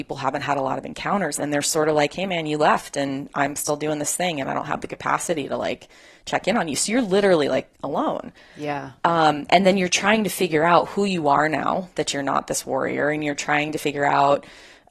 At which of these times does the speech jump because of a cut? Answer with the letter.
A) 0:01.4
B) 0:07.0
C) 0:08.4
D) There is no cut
A